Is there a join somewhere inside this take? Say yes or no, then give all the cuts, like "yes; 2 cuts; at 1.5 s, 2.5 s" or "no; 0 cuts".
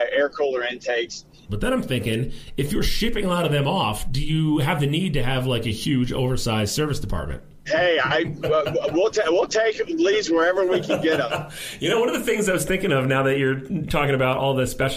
yes; 2 cuts; at 1.5 s, 7.7 s